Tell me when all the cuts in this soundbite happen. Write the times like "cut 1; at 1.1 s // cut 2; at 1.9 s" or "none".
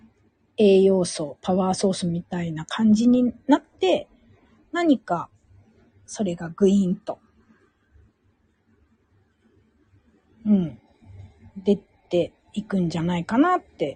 none